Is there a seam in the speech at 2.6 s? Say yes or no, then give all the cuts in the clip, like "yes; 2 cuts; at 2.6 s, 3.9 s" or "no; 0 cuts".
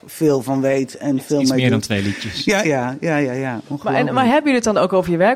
yes; 1 cut; at 2.6 s